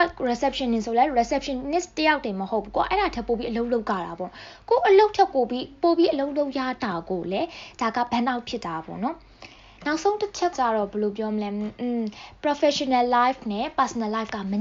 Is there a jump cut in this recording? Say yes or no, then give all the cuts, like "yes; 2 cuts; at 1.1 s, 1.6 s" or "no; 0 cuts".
yes; 1 cut; at 10.5 s